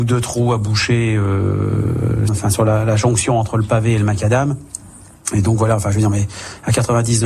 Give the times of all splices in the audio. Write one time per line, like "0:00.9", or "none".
0:02.3